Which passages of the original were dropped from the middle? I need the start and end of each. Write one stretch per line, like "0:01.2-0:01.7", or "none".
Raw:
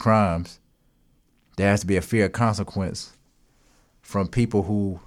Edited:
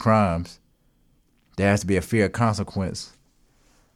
none